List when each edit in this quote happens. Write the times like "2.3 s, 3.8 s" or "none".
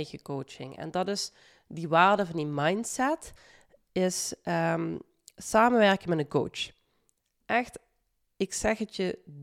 none